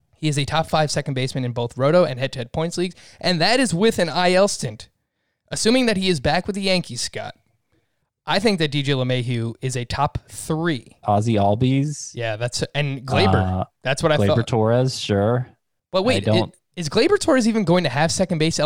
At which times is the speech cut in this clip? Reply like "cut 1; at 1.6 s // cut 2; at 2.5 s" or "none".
cut 1; at 11.0 s